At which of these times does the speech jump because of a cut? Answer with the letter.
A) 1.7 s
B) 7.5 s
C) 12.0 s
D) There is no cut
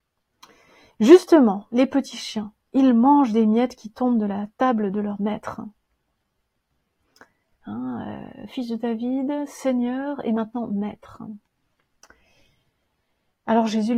B